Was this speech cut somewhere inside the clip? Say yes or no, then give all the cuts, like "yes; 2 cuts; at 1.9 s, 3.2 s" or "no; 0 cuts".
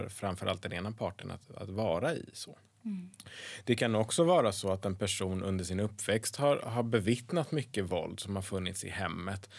no; 0 cuts